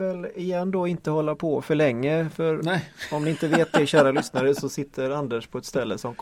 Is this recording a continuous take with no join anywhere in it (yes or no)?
yes